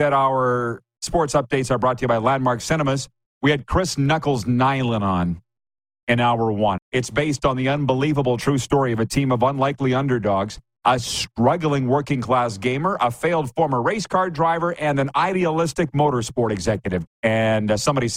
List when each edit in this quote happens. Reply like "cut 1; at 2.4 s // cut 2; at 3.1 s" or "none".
cut 1; at 3.3 s // cut 2; at 6.8 s // cut 3; at 17.1 s